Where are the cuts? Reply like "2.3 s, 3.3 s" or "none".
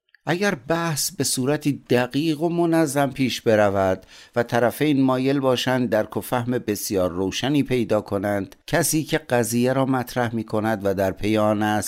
8.6 s